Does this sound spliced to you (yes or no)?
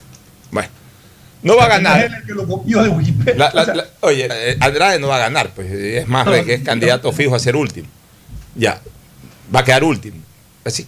yes